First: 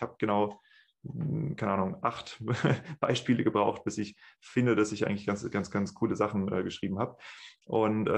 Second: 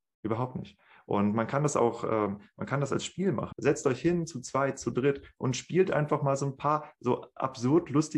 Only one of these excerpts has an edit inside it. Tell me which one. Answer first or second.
second